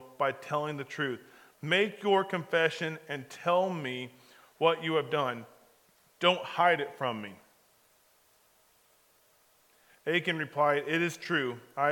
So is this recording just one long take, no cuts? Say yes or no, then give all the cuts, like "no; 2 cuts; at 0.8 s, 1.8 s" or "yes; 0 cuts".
yes; 0 cuts